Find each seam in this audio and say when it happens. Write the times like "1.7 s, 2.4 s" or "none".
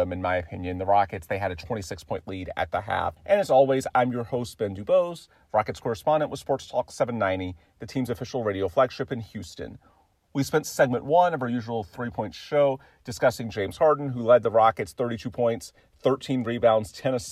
3.2 s